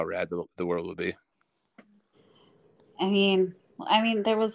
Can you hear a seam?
no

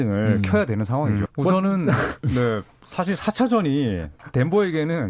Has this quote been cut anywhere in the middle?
yes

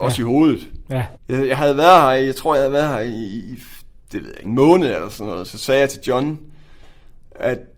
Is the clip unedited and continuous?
no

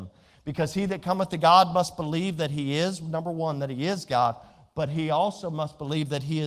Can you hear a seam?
no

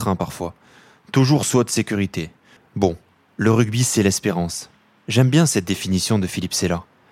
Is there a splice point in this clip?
yes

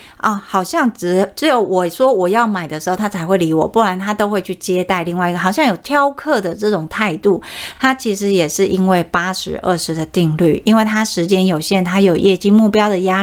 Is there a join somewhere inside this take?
no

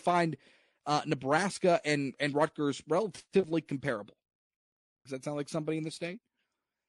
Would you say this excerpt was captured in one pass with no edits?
no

